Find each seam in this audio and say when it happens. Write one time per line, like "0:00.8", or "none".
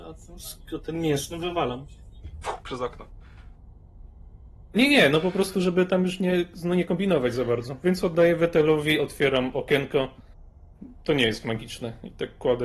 0:04.7